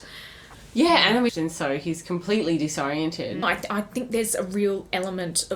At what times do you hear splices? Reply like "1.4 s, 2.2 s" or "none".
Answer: 1.3 s, 3.4 s